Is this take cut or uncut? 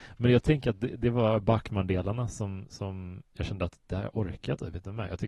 uncut